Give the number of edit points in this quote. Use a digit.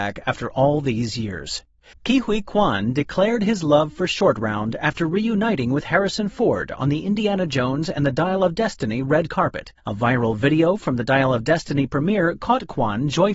2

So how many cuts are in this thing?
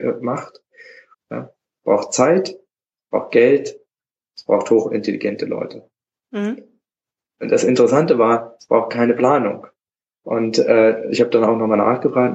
1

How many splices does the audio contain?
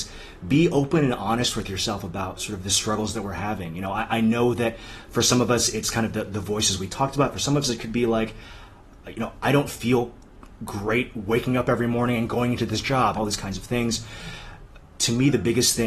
1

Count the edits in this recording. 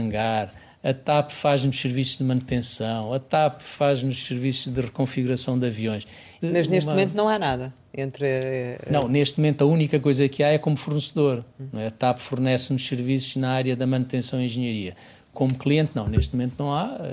1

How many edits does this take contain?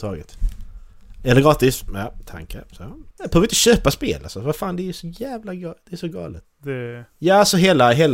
2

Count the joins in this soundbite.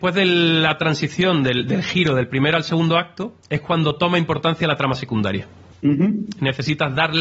0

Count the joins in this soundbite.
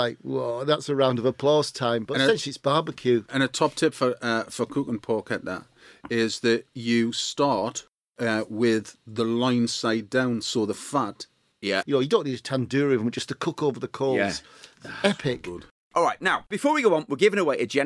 1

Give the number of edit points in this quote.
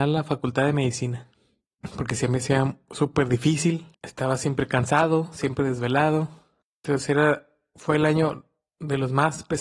2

